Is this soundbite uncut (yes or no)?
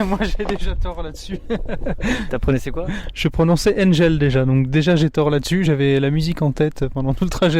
yes